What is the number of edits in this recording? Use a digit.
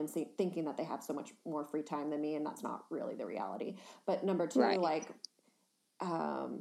0